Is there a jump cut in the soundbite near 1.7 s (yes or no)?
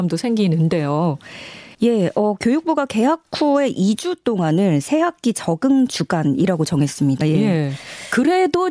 yes